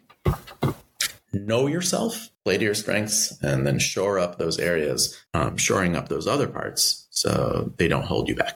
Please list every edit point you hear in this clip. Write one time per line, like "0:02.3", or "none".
0:02.3
0:05.3